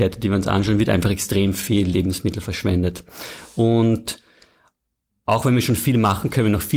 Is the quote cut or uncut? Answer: uncut